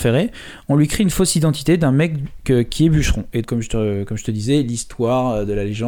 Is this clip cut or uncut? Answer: cut